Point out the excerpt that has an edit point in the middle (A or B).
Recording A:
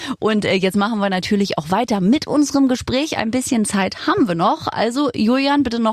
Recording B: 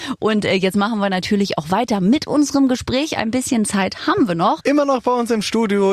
B